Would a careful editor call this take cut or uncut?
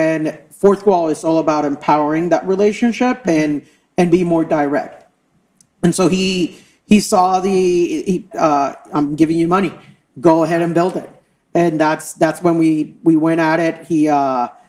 cut